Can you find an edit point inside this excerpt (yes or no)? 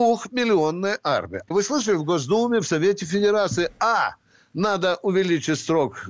yes